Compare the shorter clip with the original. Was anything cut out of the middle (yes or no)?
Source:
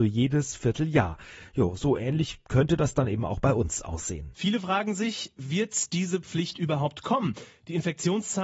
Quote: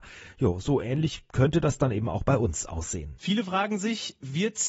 no